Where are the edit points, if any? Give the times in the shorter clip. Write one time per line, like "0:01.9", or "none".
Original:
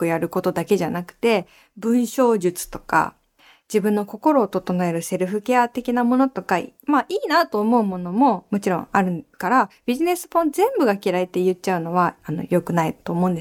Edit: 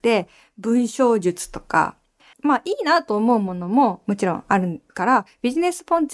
0:02.3